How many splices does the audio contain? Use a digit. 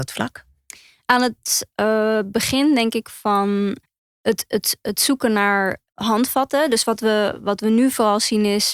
0